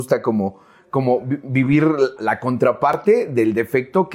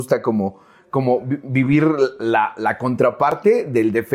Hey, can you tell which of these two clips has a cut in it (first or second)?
first